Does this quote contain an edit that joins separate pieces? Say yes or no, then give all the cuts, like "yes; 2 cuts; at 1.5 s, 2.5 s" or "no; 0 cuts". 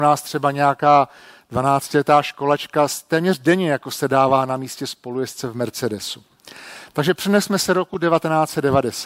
no; 0 cuts